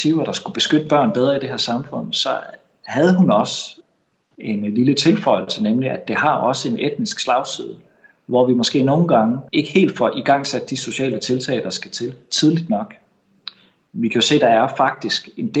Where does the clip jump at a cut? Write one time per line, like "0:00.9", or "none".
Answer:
0:09.5